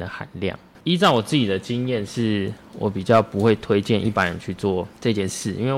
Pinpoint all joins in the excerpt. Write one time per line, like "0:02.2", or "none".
none

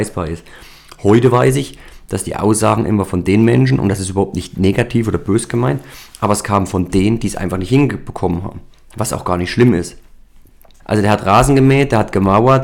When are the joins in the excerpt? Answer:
0:10.8

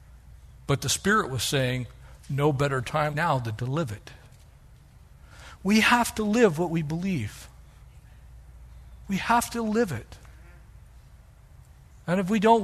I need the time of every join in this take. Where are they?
0:03.1

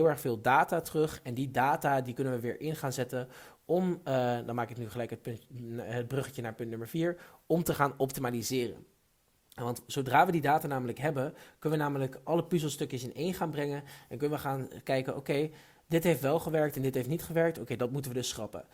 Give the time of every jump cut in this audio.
none

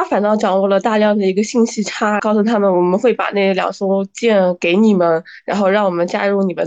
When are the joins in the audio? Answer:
0:02.2

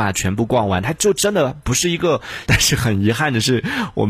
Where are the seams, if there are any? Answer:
0:02.5

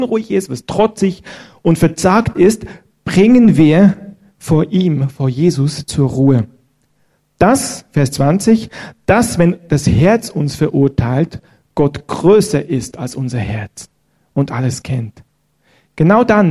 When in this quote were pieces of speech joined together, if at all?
none

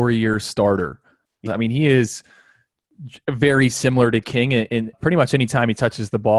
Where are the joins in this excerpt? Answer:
0:01.5
0:04.9

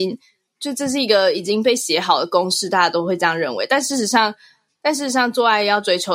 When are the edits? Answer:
none

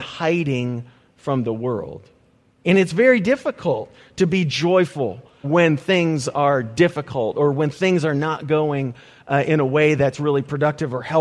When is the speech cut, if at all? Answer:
0:02.6
0:05.4

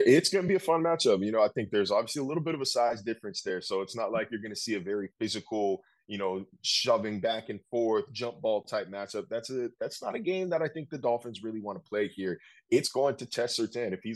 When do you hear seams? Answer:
none

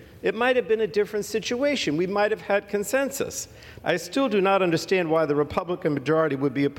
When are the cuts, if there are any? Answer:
0:03.8

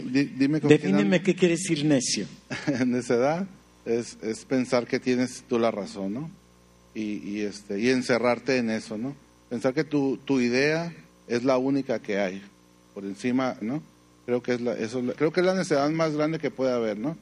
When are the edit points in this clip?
0:13.6
0:15.1

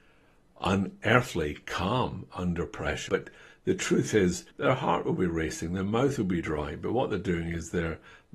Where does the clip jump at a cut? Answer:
0:03.1
0:04.5

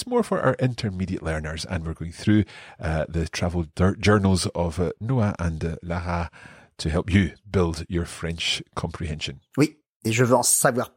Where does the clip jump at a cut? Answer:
none

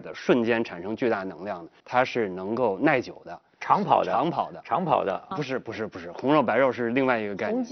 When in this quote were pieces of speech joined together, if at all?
0:01.8
0:05.3

